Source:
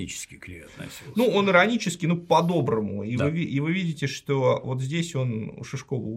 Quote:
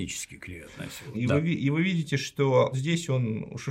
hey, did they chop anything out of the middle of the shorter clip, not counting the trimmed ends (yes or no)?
yes